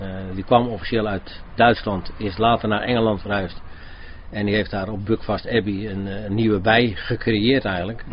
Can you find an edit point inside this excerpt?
no; 0 cuts

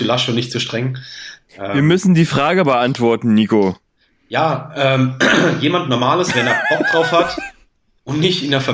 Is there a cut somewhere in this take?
no; 0 cuts

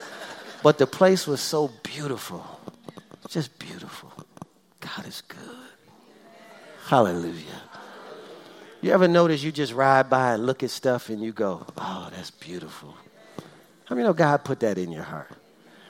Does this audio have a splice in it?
no; 0 cuts

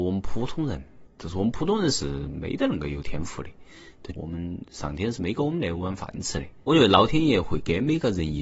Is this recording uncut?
no; 2 cuts; at 4.1 s, 6.6 s

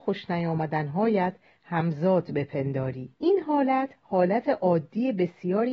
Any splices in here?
yes; 1 cut; at 3.2 s

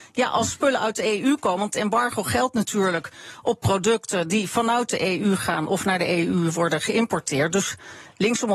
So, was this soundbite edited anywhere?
no; 0 cuts

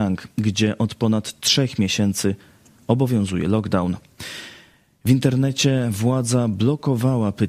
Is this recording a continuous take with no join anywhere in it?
yes; 0 cuts

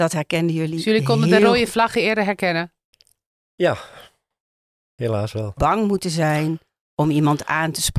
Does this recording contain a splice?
yes; 1 cut; at 5.6 s

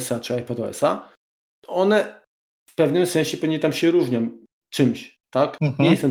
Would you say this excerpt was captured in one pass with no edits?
yes; 0 cuts

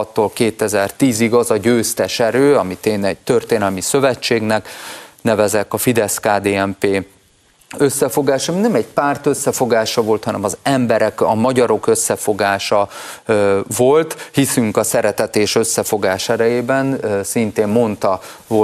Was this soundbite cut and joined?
no; 0 cuts

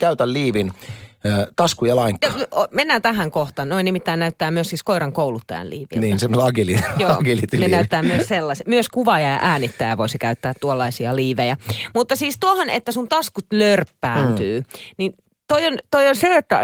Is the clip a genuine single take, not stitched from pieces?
yes; 0 cuts

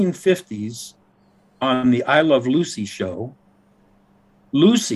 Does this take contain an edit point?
no; 0 cuts

